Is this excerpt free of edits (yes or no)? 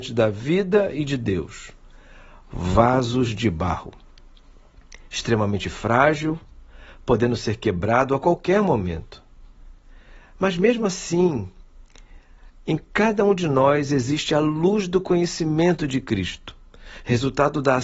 yes